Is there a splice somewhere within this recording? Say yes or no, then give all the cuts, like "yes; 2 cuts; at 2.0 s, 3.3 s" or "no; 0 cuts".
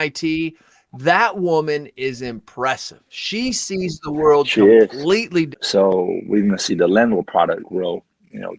yes; 2 cuts; at 5.5 s, 7.6 s